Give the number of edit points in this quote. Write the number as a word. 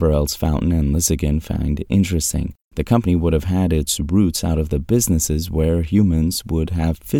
one